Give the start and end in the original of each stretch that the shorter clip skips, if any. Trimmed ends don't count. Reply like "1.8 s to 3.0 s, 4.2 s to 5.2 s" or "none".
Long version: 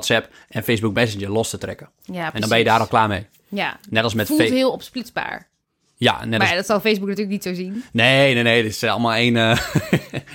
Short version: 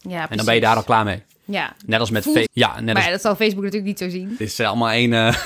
4.5 s to 5.9 s, 7.8 s to 8.6 s